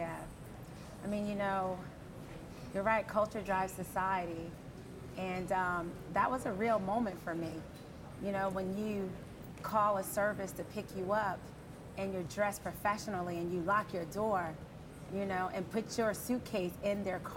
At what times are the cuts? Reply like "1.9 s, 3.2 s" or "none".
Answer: none